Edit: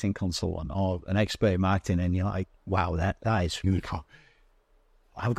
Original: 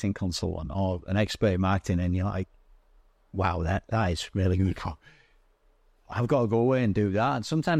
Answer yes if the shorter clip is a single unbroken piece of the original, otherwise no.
no